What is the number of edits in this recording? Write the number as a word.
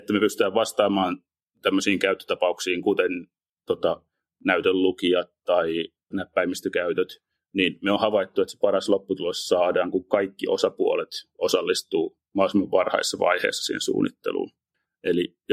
one